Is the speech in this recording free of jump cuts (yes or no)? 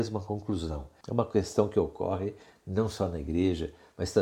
no